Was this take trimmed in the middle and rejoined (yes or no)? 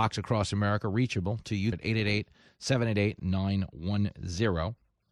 yes